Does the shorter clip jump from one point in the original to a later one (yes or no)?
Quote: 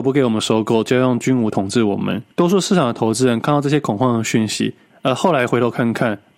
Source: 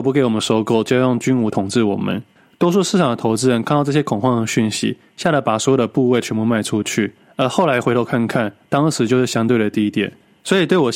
yes